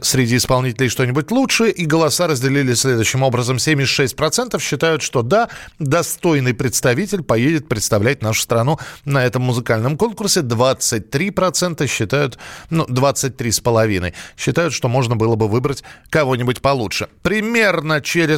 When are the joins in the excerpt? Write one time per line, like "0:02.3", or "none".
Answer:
none